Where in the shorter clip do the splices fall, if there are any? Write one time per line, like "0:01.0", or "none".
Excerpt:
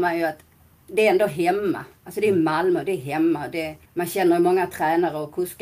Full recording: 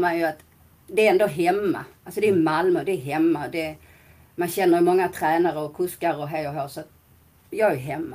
0:03.9